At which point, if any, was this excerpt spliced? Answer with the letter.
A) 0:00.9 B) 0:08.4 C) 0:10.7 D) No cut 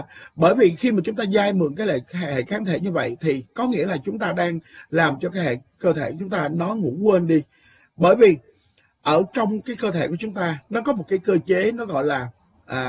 D